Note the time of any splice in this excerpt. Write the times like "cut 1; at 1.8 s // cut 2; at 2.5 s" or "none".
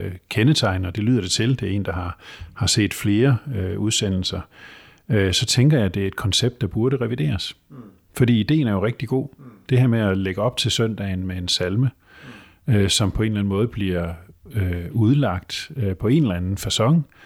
none